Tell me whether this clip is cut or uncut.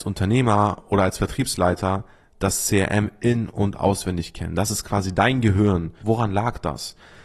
cut